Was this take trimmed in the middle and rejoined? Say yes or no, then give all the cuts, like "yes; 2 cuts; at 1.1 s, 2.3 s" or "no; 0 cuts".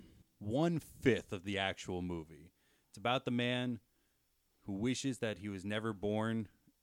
no; 0 cuts